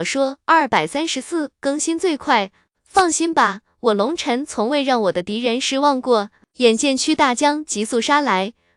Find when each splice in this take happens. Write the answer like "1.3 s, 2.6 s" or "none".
none